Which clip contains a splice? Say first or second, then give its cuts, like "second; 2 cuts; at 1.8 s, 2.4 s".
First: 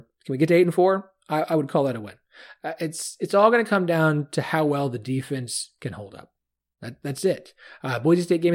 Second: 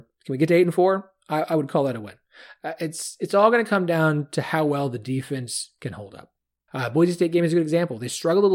second; 1 cut; at 6.7 s